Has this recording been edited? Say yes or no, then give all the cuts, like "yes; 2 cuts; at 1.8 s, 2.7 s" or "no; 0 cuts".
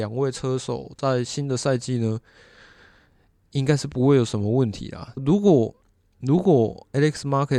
yes; 1 cut; at 5.2 s